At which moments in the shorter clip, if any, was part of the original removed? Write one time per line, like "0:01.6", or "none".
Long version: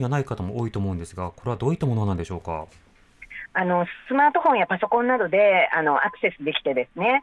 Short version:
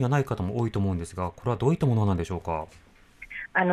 none